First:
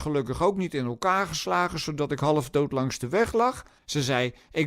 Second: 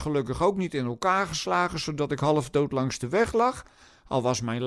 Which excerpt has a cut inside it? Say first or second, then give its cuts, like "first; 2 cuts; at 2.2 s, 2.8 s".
first; 1 cut; at 3.8 s